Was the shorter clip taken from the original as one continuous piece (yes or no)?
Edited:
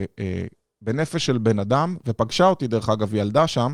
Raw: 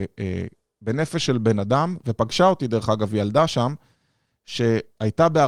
yes